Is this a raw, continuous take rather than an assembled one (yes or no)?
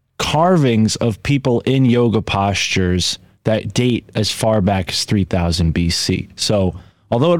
yes